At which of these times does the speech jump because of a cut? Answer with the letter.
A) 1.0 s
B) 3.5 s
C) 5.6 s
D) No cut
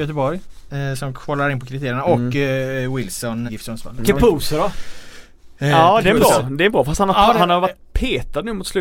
B